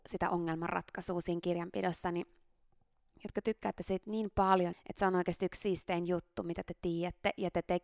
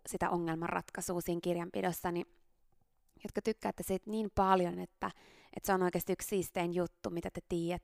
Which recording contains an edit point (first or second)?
first